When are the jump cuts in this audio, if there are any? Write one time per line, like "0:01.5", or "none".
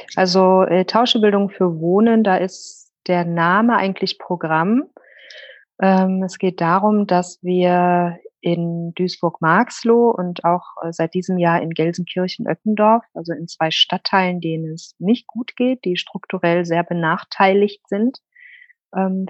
none